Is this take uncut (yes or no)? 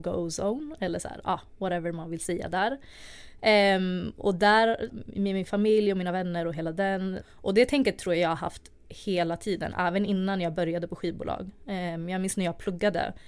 no